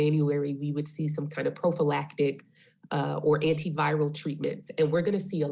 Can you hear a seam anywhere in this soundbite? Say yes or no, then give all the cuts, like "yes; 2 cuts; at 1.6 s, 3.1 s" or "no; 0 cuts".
no; 0 cuts